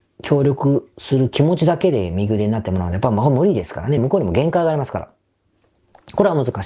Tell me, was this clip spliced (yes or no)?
no